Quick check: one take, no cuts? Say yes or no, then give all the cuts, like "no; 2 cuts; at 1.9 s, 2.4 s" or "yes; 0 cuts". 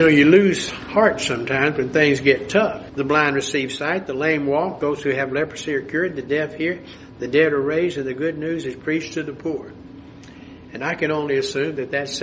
no; 1 cut; at 2.9 s